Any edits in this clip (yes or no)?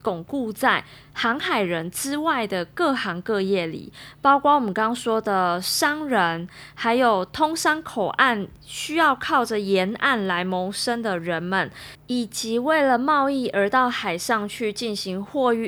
no